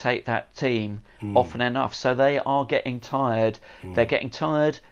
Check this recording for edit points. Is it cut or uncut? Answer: uncut